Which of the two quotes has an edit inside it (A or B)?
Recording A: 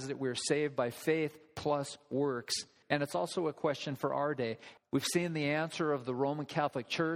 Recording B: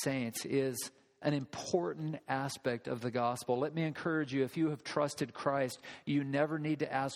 A